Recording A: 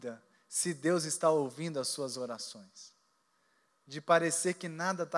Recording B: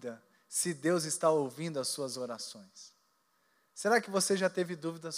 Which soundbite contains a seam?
A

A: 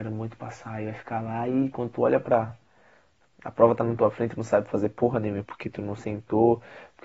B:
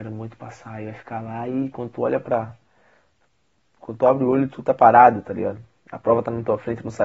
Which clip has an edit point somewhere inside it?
A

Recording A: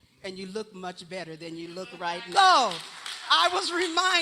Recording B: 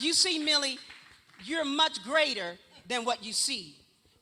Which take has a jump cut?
A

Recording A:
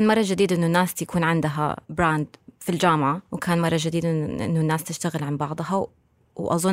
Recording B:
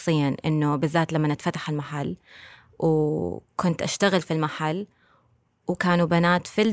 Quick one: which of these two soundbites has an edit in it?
A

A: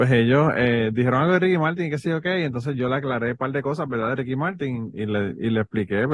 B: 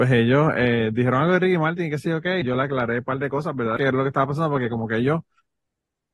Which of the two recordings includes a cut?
B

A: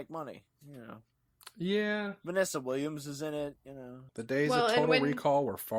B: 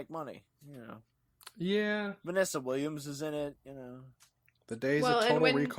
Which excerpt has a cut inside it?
A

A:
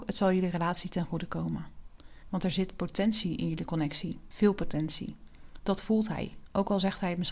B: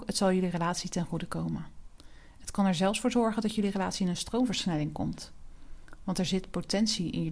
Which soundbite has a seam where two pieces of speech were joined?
A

